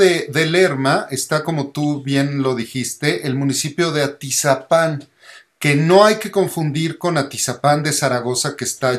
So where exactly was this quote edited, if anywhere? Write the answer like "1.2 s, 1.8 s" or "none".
none